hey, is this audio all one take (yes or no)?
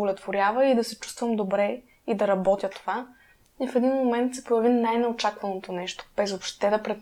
yes